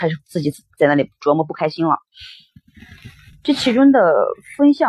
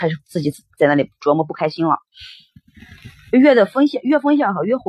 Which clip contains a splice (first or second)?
second